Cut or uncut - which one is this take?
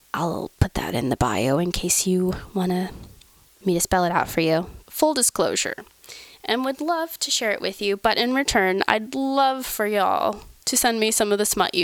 cut